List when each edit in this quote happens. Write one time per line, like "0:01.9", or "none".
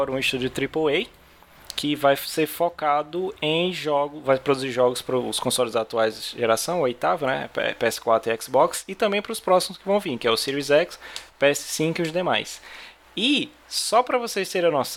none